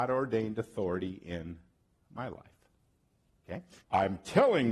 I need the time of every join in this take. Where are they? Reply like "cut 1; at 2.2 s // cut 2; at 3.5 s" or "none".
cut 1; at 3.8 s